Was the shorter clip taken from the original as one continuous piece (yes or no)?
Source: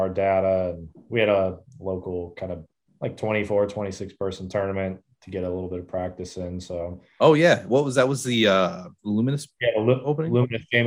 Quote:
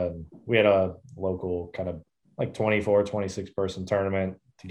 yes